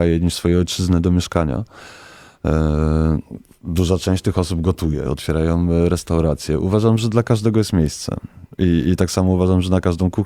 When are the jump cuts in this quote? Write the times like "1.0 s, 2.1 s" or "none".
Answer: 5.1 s